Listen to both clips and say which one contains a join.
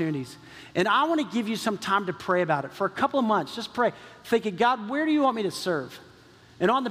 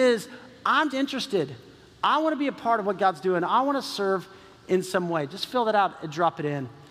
second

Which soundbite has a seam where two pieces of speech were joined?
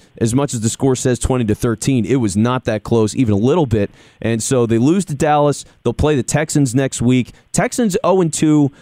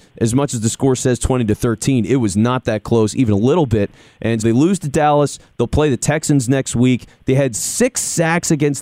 second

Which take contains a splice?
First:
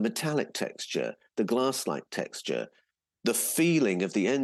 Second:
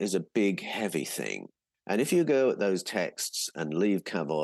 second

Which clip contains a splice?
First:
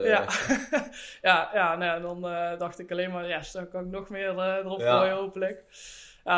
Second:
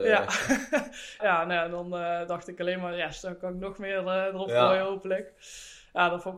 second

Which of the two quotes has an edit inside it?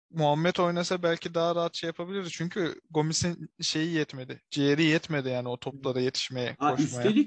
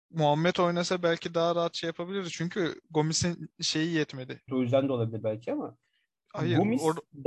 second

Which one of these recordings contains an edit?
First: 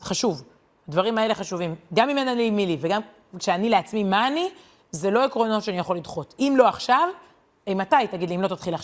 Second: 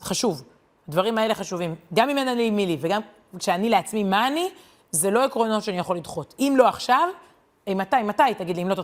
first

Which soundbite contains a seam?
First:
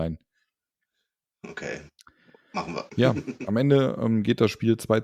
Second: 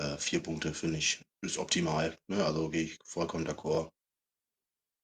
second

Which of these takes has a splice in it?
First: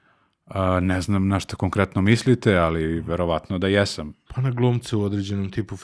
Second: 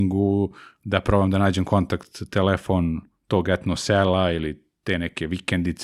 first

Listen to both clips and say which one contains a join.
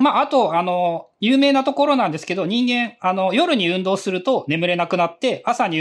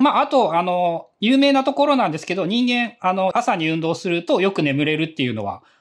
second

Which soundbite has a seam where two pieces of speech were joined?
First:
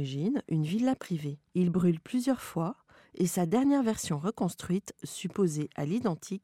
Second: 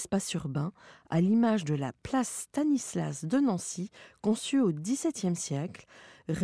first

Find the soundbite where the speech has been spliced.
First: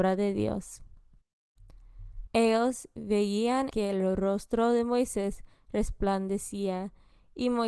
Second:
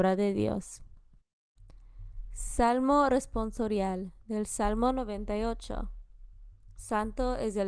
first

